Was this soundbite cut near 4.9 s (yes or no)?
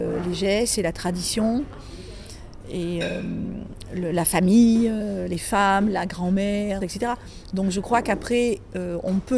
no